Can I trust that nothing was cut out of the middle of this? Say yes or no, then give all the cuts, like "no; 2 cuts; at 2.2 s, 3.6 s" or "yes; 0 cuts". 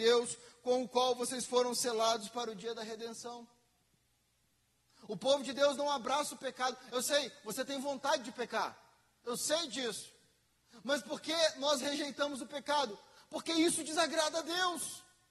yes; 0 cuts